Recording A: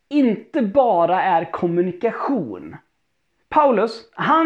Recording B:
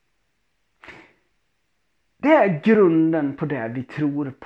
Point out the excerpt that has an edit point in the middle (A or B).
A